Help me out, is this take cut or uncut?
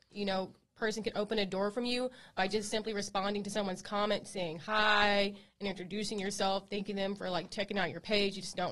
uncut